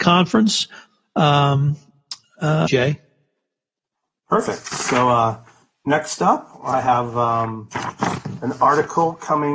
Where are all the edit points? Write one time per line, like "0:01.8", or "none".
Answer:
0:02.7